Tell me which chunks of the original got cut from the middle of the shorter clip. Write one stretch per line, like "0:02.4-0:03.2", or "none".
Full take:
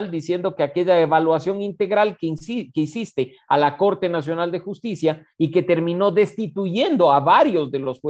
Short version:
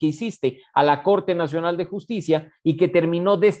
none